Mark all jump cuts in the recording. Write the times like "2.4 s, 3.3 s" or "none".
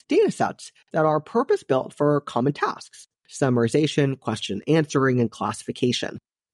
3.2 s